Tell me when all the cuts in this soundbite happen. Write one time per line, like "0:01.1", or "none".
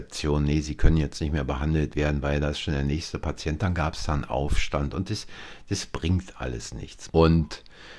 0:07.1